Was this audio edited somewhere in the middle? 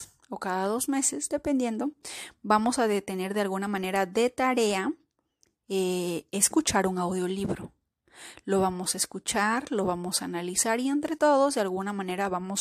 no; 0 cuts

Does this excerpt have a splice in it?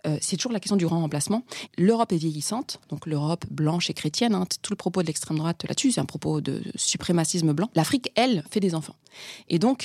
yes; 1 cut; at 1.7 s

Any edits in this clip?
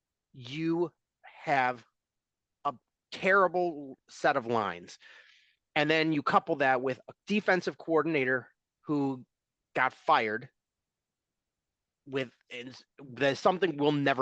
yes; 1 cut; at 2.6 s

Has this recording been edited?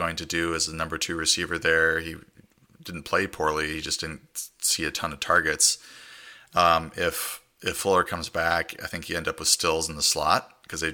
no; 0 cuts

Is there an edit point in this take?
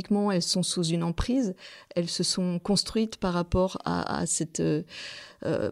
no; 0 cuts

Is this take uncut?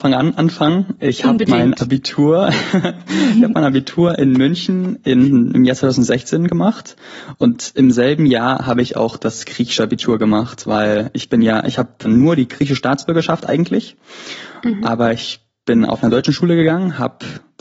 no; 2 cuts; at 12.0 s, 15.9 s

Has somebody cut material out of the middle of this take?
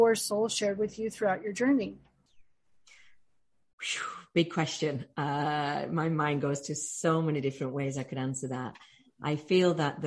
no; 0 cuts

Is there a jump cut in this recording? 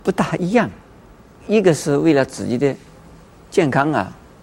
yes; 1 cut; at 1.4 s

